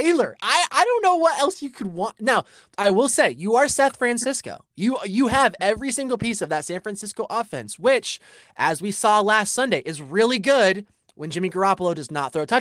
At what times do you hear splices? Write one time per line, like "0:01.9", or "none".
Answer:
none